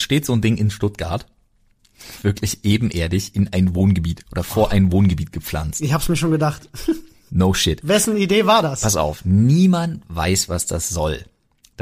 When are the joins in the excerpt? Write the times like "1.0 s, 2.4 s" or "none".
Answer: none